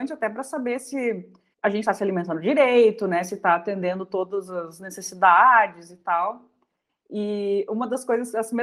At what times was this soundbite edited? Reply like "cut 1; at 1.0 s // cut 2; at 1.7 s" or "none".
cut 1; at 1.5 s